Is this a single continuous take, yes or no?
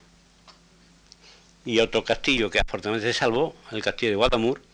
yes